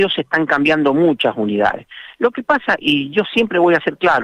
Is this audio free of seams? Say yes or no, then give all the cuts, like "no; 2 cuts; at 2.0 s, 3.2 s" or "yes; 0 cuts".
no; 1 cut; at 2.8 s